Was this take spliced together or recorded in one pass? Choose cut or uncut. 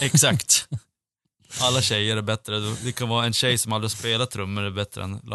uncut